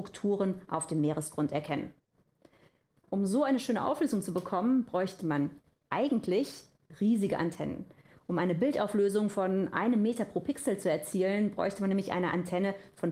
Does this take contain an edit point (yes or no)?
no